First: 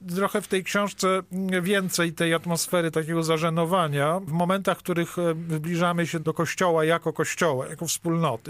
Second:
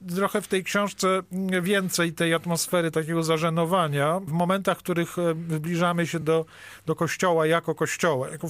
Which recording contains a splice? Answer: first; 1 cut; at 6.2 s

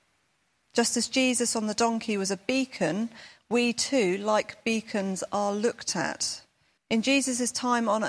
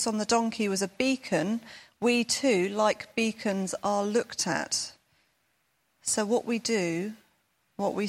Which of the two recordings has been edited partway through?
first; 1 cut; at 6.8 s

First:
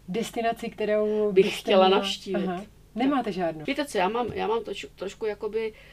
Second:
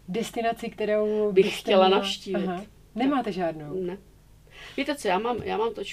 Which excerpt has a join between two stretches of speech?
first; 1 cut; at 3.6 s

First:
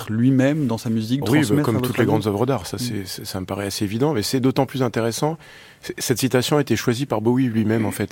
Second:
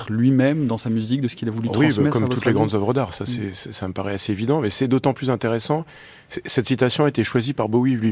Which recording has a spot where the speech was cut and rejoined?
first; 1 cut; at 1.2 s

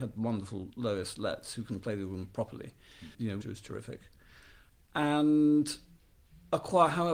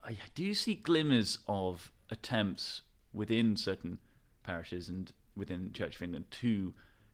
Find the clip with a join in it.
first; 1 cut; at 3.4 s

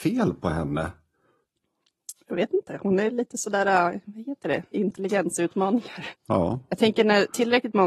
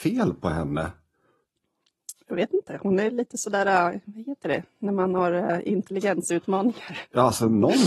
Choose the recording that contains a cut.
first; 2 cuts; at 4.7 s, 6.1 s

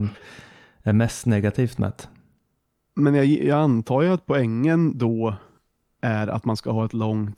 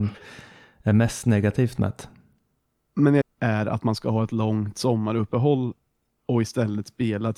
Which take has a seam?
second; 1 cut; at 3.2 s

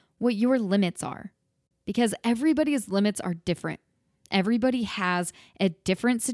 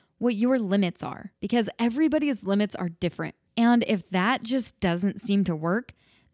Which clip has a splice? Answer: second; 2 cuts; at 1.4 s, 3.5 s

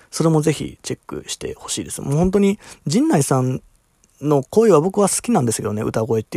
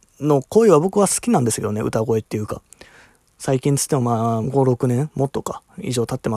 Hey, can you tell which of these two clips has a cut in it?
second; 2 cuts; at 3.3 s, 4.4 s

